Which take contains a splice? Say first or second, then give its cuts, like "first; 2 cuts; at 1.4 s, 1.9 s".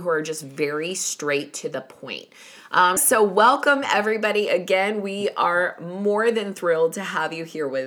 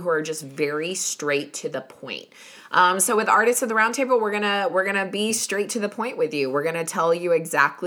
first; 1 cut; at 3.0 s